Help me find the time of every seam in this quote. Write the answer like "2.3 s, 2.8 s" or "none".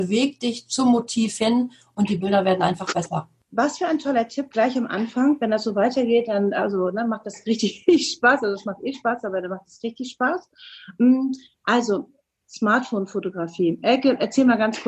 8.9 s

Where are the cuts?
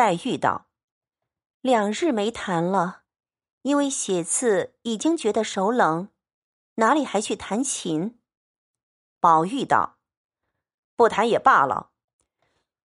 none

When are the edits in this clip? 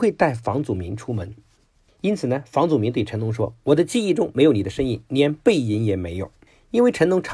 none

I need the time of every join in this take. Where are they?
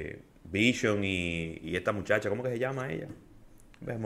1.6 s

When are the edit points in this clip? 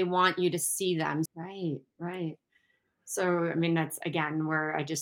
1.3 s

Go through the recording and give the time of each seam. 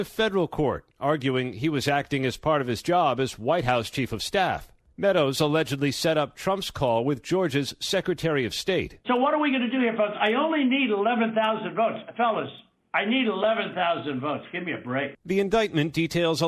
none

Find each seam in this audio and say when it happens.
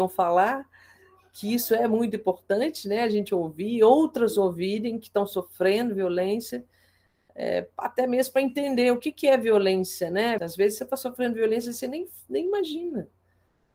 10.4 s

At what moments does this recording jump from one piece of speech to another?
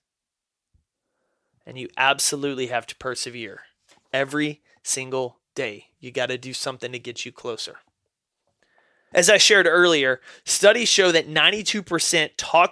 1.5 s, 9.1 s

